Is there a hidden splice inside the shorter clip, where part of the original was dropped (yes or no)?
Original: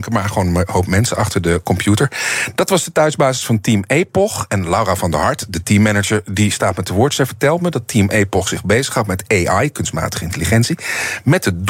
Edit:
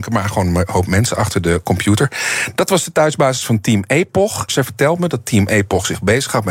yes